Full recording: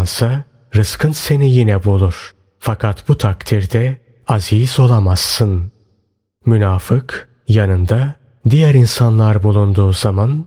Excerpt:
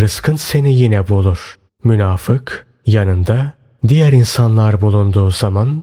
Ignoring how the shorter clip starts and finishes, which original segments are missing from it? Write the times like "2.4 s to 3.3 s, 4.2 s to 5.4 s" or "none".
2.4 s to 6.3 s